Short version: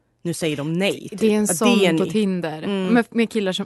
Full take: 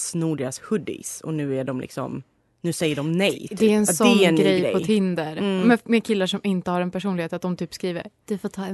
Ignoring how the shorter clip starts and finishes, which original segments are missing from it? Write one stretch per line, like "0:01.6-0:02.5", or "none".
0:04.4-0:04.7